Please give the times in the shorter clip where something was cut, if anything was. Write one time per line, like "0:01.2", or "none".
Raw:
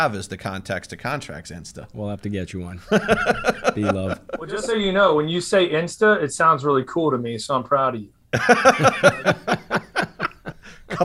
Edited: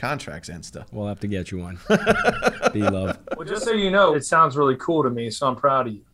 0:04.1

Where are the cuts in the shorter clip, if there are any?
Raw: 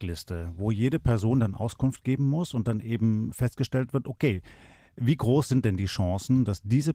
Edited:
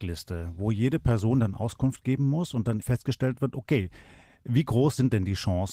0:02.8

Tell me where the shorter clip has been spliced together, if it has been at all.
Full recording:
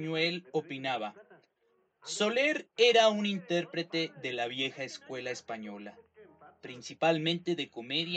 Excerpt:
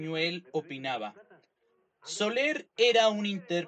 none

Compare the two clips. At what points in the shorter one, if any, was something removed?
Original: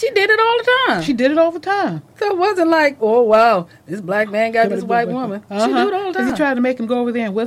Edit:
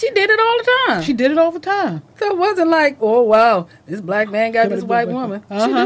none

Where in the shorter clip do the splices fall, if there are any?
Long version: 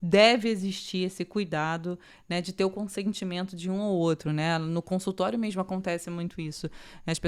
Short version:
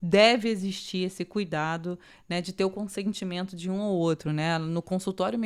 none

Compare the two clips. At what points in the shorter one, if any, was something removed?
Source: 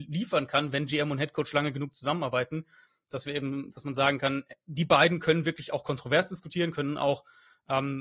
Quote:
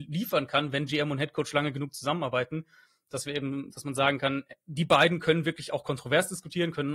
none

